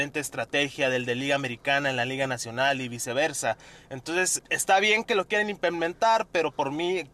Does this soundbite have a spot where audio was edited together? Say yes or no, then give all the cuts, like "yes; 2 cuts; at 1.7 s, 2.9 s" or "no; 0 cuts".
yes; 1 cut; at 4.4 s